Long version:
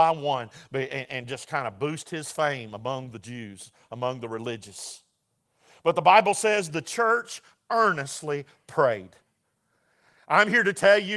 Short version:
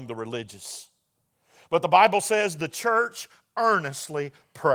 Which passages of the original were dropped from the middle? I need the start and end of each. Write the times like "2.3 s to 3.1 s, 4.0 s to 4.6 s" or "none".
none